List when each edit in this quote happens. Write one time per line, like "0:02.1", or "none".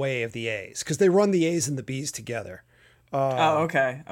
none